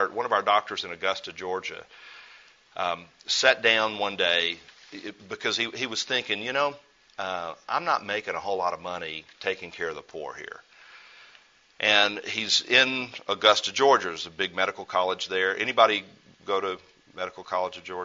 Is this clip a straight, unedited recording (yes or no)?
yes